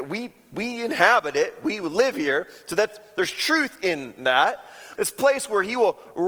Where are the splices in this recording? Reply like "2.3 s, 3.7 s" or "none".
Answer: 5.0 s